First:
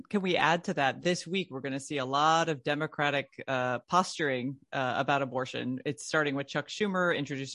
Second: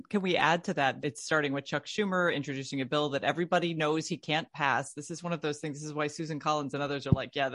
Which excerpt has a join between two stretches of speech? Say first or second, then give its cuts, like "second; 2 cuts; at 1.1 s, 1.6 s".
second; 2 cuts; at 1.0 s, 4.9 s